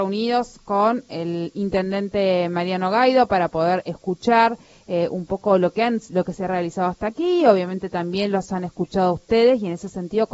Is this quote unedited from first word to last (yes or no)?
yes